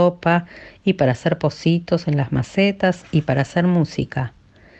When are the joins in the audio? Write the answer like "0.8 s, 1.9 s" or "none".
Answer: none